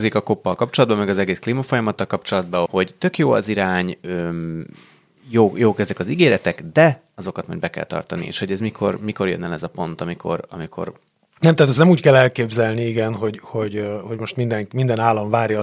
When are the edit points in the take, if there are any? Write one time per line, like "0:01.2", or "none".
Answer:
0:02.7